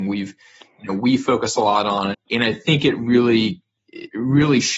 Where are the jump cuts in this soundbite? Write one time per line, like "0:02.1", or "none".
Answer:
0:02.1